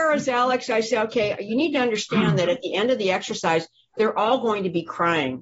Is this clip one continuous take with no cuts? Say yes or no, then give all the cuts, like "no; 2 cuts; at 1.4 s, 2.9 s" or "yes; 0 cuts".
yes; 0 cuts